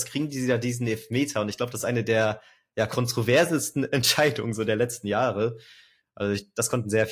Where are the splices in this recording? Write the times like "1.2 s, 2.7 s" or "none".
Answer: none